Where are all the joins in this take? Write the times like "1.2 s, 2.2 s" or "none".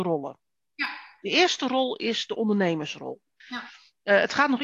3.4 s